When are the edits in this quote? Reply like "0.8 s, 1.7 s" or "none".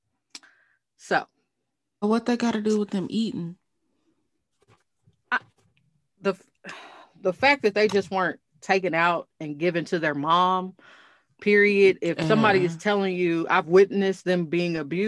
2.0 s